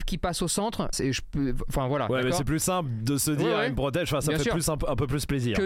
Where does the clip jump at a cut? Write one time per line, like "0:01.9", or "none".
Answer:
0:00.9